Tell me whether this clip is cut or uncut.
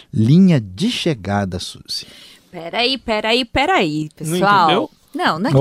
uncut